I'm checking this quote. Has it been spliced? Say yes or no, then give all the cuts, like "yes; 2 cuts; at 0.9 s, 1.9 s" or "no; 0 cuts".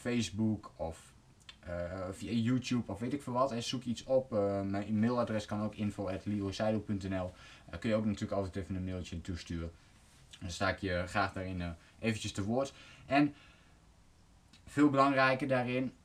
no; 0 cuts